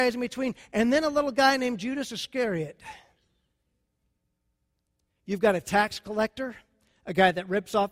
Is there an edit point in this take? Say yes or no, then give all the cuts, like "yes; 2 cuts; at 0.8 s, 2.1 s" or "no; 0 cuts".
yes; 1 cut; at 5.2 s